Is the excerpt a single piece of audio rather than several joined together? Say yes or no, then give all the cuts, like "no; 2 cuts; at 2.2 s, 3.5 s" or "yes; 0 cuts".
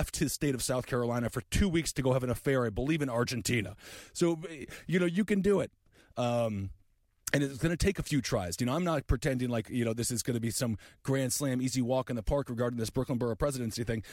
yes; 0 cuts